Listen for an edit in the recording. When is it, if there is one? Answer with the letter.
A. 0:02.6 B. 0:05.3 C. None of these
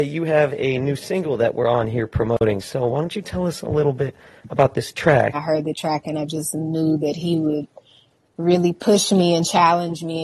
B